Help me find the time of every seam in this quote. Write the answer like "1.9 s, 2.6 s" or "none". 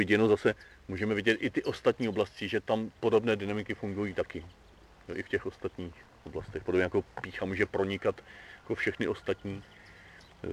none